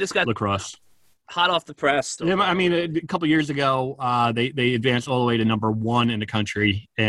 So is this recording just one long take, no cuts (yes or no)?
no